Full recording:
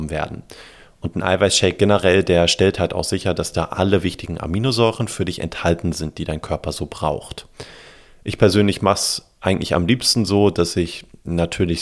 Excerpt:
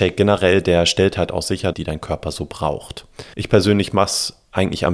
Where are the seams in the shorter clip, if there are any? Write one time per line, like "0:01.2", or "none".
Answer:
0:01.7
0:03.3